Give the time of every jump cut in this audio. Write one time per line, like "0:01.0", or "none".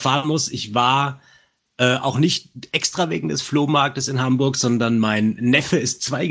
none